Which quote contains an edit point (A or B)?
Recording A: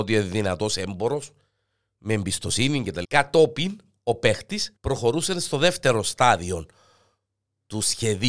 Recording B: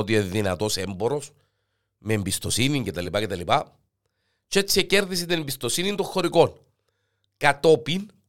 A